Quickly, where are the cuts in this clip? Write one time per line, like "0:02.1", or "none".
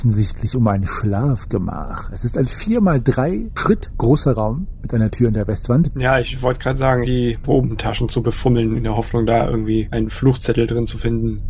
0:05.9
0:07.0